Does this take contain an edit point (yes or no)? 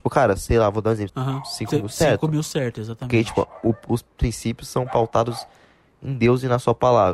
yes